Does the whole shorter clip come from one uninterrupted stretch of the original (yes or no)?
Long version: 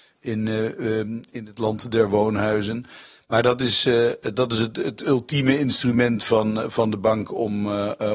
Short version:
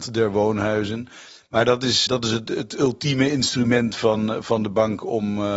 no